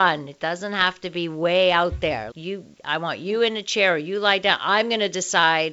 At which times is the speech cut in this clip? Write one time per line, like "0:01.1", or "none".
0:02.3